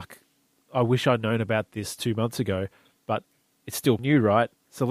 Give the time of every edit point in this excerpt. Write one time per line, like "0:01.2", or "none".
0:04.0